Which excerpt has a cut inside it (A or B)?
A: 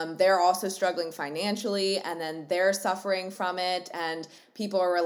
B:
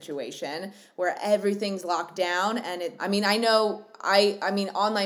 B